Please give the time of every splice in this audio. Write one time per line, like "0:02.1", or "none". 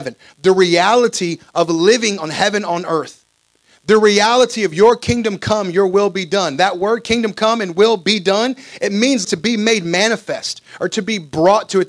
0:09.2